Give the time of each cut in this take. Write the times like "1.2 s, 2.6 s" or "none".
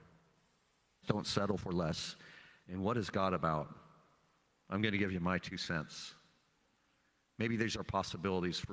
1.0 s, 2.6 s

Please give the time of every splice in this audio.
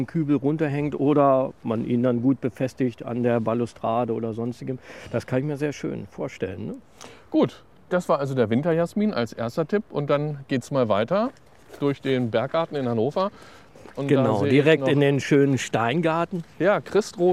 13.9 s

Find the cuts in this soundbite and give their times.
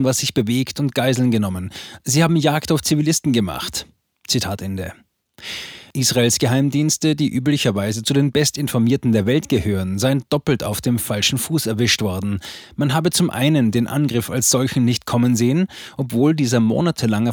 none

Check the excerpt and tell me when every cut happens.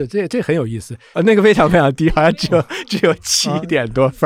1.1 s

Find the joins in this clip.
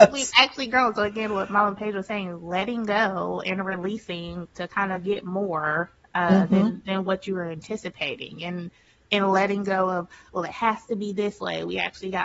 none

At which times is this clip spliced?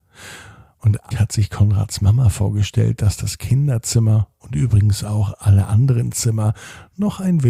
1.1 s

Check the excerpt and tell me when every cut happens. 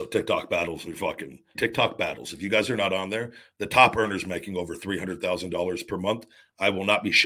1.5 s

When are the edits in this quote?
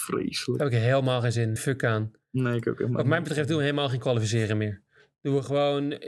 1.6 s

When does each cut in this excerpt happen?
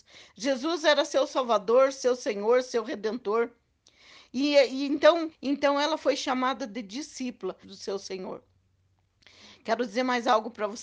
5.3 s, 7.6 s

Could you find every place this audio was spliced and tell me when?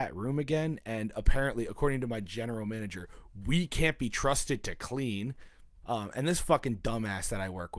5.8 s

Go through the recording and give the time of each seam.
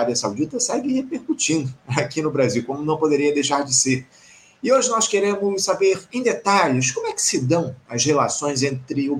none

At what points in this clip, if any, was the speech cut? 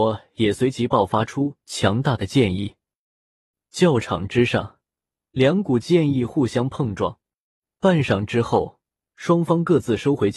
none

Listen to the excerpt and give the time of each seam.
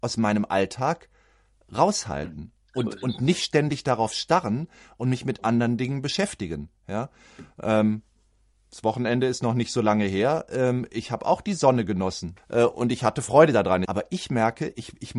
12.4 s, 13.9 s

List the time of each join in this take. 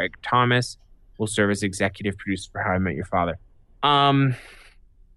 none

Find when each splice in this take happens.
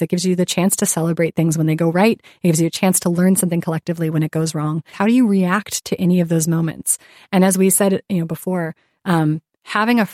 4.9 s

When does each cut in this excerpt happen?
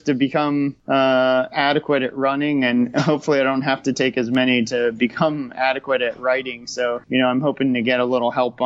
none

